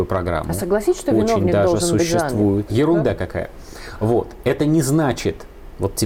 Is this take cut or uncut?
cut